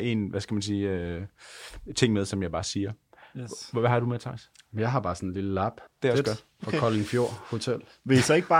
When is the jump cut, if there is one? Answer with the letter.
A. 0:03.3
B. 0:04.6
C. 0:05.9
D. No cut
C